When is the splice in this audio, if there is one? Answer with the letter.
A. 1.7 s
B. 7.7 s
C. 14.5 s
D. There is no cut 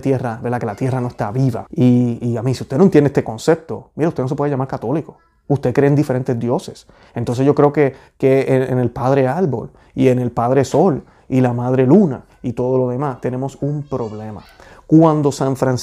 A